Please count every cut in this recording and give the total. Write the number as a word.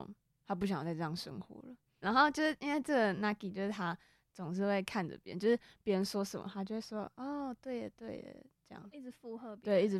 one